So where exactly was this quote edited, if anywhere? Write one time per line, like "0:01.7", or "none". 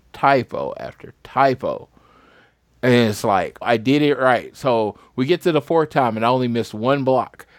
0:03.6